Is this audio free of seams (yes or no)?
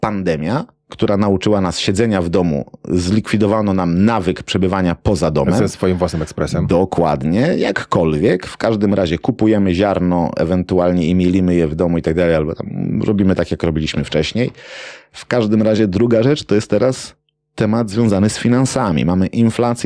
yes